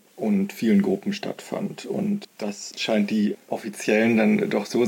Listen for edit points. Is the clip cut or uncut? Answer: uncut